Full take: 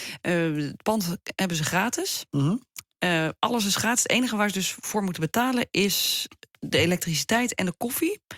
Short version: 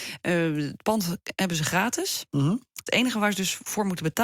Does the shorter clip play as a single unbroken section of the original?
no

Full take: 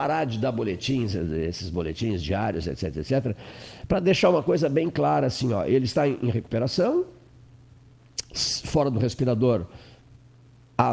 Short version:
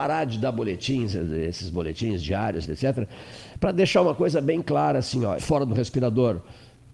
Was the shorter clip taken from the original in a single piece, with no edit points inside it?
no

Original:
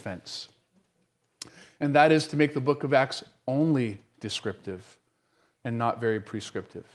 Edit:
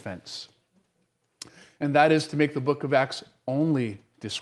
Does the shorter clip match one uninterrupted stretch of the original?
yes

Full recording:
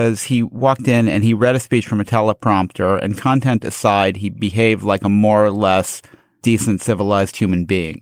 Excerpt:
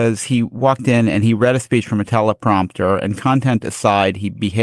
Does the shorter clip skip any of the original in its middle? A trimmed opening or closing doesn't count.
no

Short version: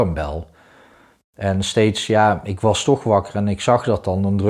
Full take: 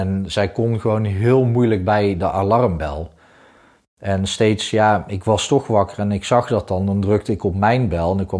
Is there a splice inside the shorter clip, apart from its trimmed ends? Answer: no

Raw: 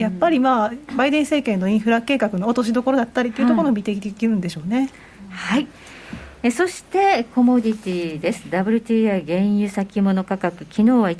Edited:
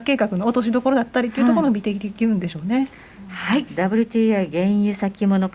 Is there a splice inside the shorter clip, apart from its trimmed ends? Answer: yes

